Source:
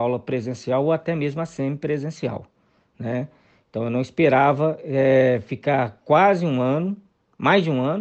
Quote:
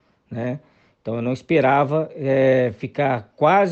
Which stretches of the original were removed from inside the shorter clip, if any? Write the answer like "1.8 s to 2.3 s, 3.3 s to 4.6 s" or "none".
none